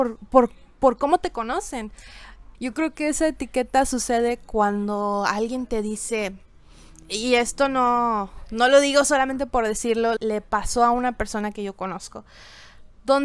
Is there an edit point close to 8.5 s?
no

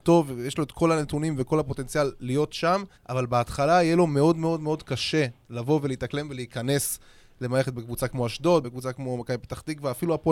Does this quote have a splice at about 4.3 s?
no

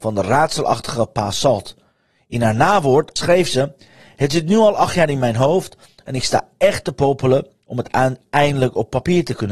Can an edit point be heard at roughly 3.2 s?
yes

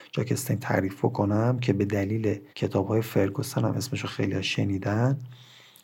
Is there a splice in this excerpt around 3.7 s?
no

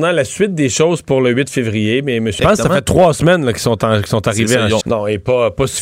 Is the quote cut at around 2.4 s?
yes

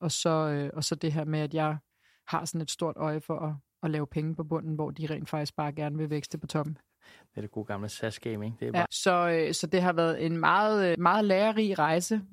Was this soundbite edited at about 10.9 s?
yes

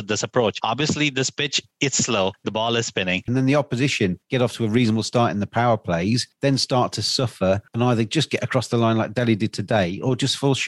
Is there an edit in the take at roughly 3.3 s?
yes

